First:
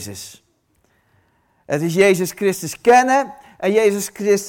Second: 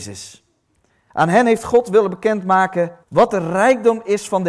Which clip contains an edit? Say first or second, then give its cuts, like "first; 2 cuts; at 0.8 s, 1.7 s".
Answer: second; 2 cuts; at 1.1 s, 3.0 s